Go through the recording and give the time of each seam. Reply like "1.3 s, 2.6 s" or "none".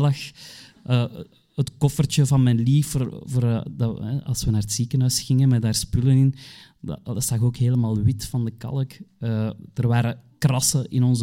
none